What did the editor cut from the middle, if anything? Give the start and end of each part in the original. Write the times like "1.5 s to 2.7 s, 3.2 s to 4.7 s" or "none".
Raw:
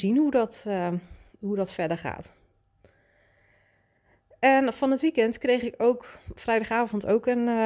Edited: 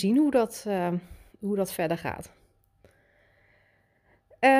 none